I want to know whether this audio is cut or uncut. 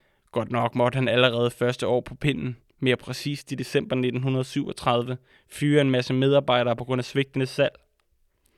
uncut